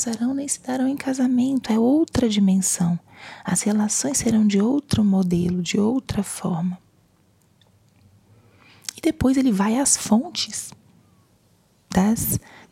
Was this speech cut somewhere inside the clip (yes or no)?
no